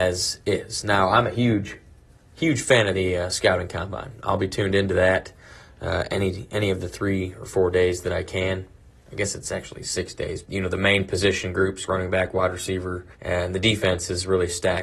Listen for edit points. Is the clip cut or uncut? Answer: cut